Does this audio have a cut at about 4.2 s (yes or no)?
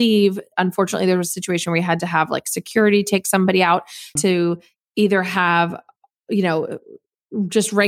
yes